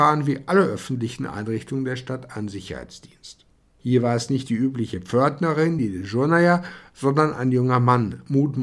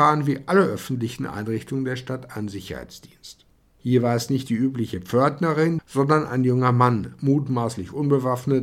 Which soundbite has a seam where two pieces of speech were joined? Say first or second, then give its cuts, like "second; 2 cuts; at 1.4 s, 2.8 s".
second; 1 cut; at 5.8 s